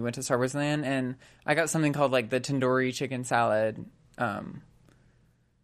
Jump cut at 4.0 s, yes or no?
no